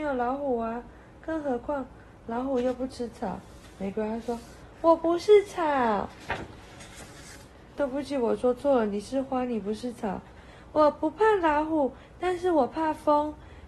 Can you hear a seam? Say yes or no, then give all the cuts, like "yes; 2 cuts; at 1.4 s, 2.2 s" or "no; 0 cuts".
yes; 1 cut; at 7.8 s